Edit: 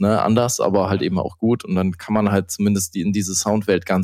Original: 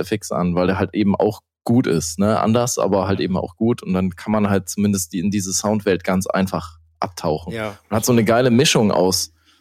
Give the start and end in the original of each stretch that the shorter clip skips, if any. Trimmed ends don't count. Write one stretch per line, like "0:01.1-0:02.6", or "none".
none